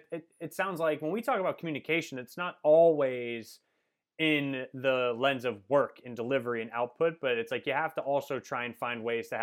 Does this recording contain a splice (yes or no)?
no